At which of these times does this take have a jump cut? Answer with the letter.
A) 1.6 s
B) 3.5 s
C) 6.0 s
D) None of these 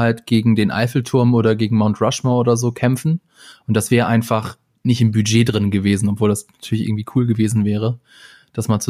D